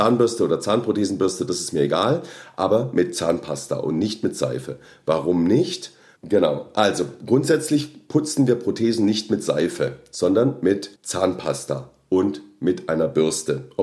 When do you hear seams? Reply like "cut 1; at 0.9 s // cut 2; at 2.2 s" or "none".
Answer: cut 1; at 6.2 s // cut 2; at 11.0 s